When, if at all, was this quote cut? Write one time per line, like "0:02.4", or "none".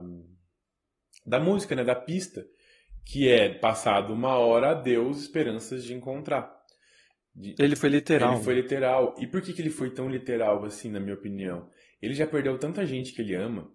none